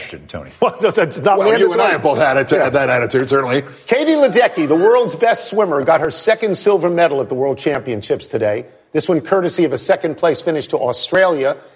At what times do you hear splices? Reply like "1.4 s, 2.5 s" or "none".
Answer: none